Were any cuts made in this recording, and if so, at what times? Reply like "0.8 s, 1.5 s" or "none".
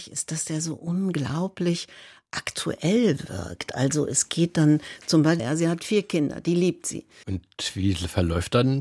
5.4 s, 7.2 s